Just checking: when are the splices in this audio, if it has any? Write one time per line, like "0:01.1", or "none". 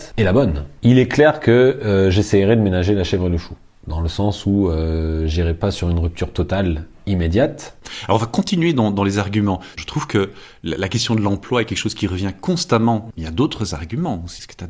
0:09.7